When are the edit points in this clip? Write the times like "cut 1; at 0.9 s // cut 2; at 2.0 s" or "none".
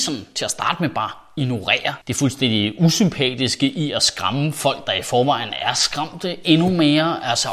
cut 1; at 2.0 s